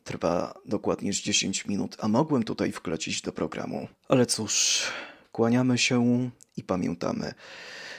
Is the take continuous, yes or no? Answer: no